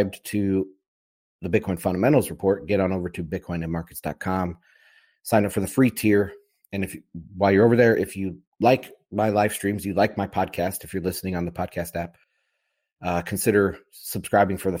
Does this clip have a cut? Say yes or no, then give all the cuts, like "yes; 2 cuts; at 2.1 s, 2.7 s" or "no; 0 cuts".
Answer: no; 0 cuts